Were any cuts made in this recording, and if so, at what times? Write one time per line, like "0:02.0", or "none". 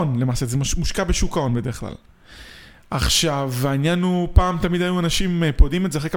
none